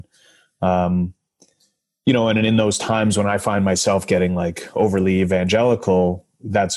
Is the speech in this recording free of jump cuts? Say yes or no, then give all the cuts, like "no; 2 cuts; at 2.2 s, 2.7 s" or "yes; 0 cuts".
yes; 0 cuts